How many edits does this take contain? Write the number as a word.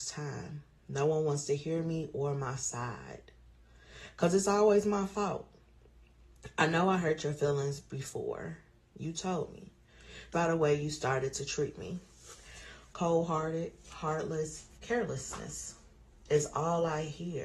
three